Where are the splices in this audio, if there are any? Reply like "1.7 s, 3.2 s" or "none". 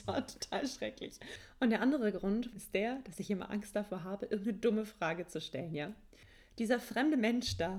2.5 s